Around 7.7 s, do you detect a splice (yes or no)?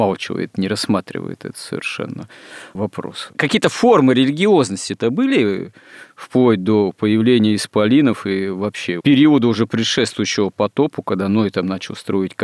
no